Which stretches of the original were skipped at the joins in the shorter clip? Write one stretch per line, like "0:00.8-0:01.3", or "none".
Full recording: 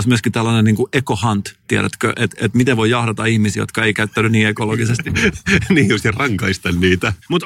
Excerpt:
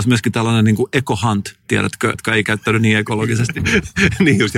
0:02.1-0:03.6